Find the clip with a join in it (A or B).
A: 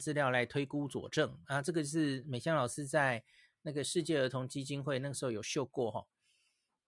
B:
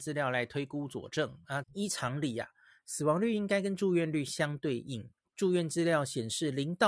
B